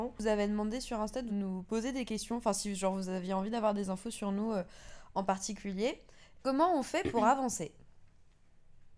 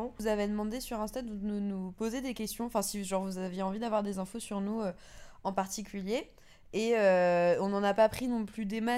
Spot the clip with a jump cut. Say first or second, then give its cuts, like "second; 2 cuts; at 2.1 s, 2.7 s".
first; 2 cuts; at 1.3 s, 6.4 s